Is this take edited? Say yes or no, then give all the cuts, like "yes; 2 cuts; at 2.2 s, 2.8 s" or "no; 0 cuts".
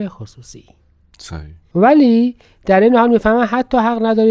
yes; 1 cut; at 1.7 s